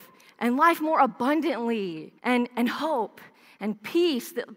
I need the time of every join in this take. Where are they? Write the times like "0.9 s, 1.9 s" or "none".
2.2 s

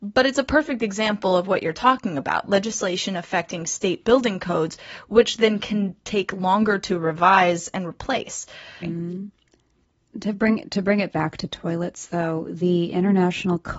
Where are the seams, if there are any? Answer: 8.8 s

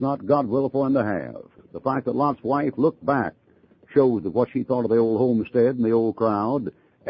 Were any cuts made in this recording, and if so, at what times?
1.6 s

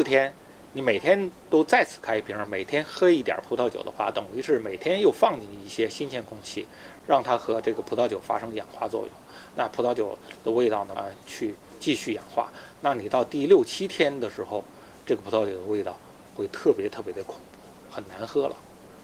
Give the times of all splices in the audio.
11.0 s

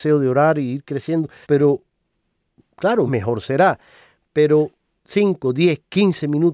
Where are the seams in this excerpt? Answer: 1.4 s, 3.1 s

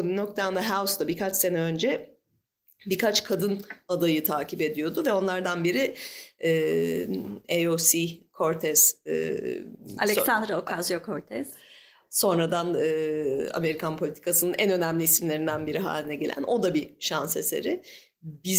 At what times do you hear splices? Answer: none

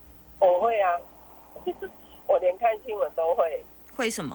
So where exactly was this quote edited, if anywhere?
1.6 s

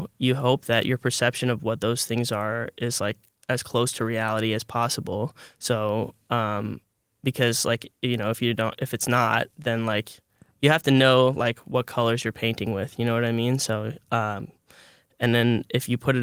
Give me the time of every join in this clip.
none

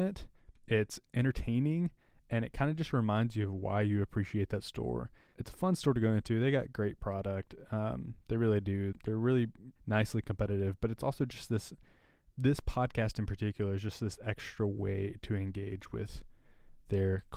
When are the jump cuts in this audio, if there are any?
none

